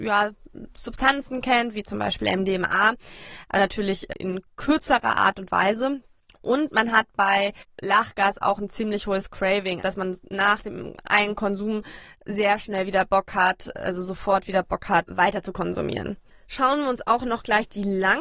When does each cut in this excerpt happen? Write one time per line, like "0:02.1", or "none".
0:09.8